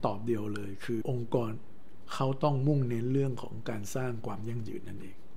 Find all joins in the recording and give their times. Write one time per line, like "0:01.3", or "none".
0:01.0